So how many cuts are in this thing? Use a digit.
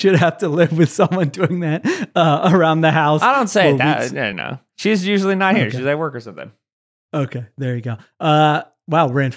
1